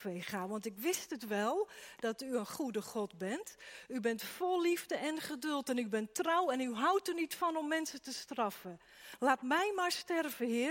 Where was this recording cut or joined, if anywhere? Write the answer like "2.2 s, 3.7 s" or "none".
none